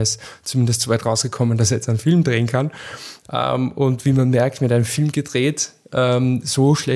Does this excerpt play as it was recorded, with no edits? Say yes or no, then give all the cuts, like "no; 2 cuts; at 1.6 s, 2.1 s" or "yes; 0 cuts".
no; 1 cut; at 3.2 s